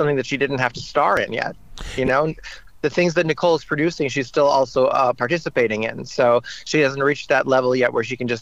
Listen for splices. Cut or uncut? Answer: uncut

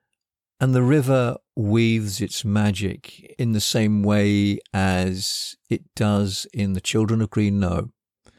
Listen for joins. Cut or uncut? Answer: uncut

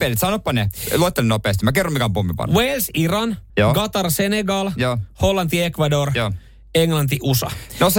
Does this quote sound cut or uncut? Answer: cut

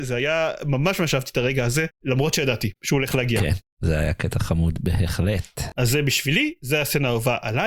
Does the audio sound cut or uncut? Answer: uncut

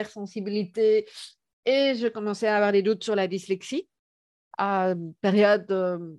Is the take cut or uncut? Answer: uncut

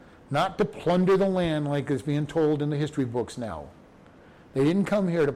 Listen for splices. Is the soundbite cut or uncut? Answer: uncut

